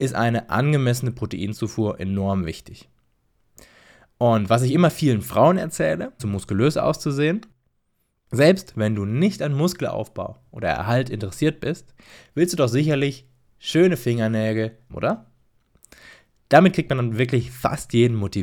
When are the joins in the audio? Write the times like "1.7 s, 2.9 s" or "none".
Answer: 6.2 s, 14.9 s